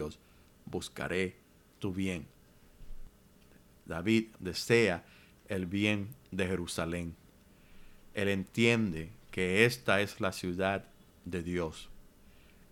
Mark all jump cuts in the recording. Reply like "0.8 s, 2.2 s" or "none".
none